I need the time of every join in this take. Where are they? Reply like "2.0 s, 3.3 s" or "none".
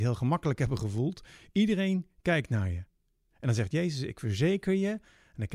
none